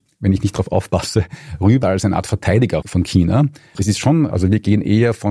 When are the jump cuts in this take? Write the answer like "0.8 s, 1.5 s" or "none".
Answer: 3.8 s